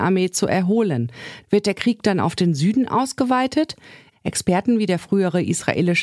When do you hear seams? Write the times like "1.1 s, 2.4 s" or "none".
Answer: 1.4 s, 4.1 s